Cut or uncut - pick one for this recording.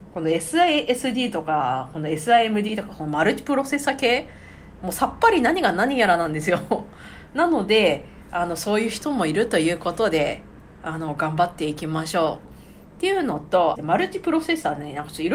cut